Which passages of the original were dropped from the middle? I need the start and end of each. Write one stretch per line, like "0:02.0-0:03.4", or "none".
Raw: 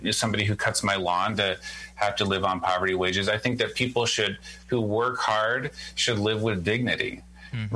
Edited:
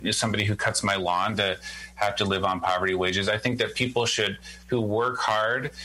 none